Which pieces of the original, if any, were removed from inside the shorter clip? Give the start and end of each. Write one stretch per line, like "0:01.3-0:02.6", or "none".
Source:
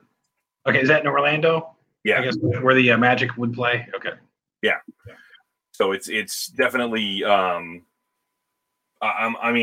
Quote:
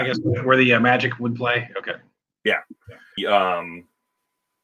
0:05.4-0:07.2